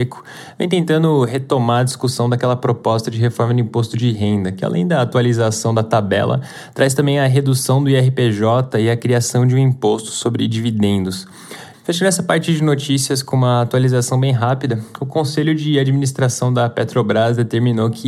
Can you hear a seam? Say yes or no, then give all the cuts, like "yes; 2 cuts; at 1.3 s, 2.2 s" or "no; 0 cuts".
yes; 1 cut; at 11.7 s